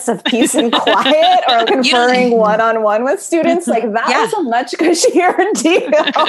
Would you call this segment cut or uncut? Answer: cut